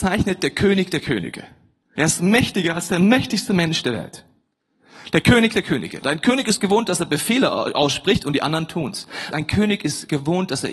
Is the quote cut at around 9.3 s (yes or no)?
yes